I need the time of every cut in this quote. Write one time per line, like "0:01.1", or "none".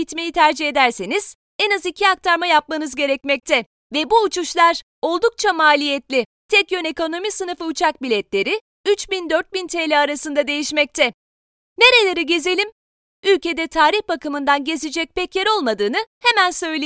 none